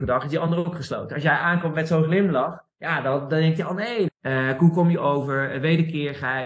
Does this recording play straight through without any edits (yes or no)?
no